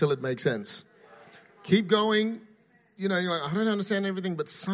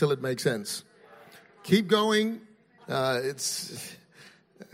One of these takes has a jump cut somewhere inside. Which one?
second; 1 cut; at 2.8 s

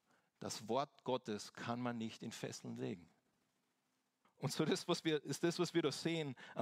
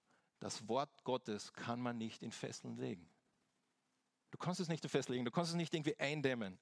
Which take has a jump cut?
first; 1 cut; at 4.2 s

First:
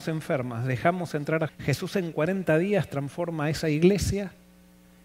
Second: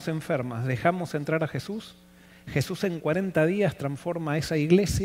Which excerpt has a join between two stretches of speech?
first; 1 cut; at 1.5 s

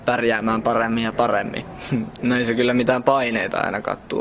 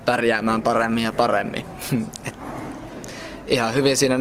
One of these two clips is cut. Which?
first; 1 cut; at 2.2 s

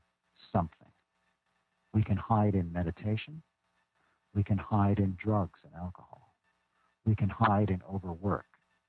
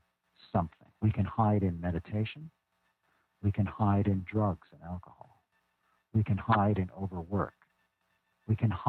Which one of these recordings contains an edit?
second; 1 cut; at 1.0 s

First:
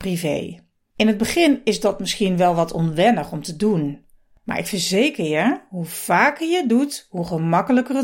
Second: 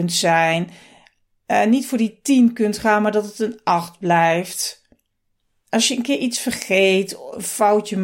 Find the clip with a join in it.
first; 1 cut; at 0.9 s

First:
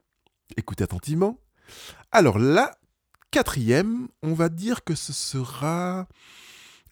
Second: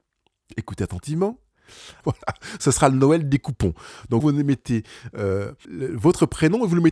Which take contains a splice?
second; 3 cuts; at 2.0 s, 4.2 s, 5.6 s

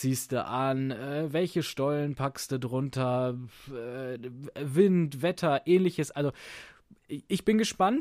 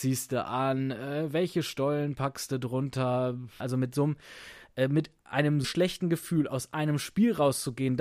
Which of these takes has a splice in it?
second; 2 cuts; at 3.6 s, 5.6 s

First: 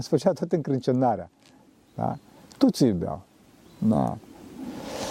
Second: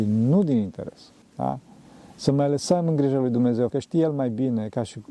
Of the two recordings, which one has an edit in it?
second; 2 cuts; at 1.2 s, 3.7 s

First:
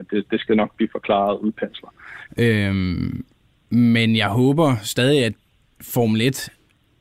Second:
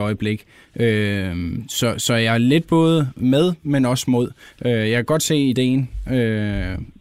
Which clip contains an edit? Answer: first; 1 cut; at 2.3 s

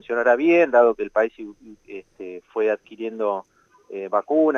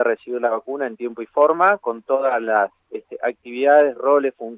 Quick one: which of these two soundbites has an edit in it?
second; 1 cut; at 2.8 s

